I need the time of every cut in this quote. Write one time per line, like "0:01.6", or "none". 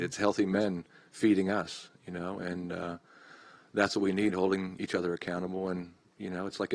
none